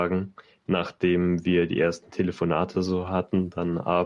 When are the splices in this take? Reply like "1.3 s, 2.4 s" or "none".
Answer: none